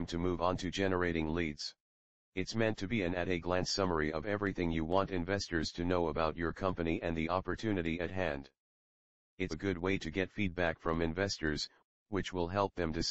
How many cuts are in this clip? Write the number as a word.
two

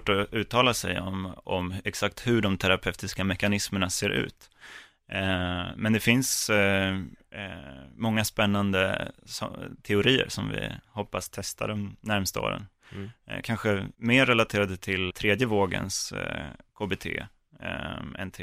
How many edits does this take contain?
two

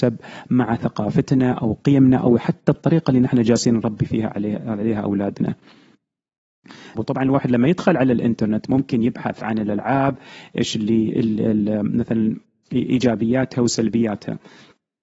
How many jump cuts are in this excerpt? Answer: one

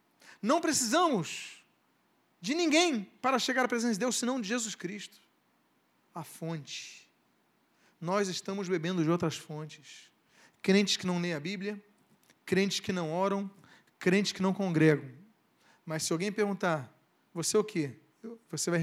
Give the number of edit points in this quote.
zero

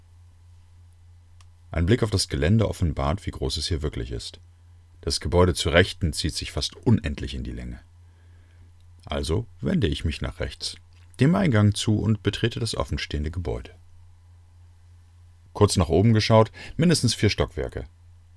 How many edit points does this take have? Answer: one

